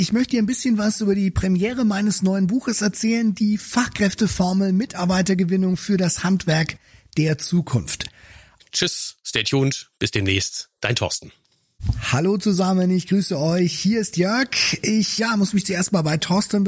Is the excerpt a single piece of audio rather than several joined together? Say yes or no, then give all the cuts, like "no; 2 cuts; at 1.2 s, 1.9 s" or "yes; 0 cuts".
no; 2 cuts; at 8.6 s, 15.2 s